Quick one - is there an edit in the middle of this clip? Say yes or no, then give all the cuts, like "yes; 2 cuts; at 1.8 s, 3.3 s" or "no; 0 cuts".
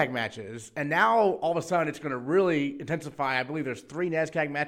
no; 0 cuts